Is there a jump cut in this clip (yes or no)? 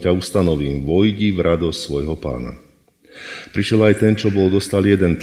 no